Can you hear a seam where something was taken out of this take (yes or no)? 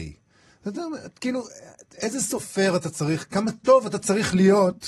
no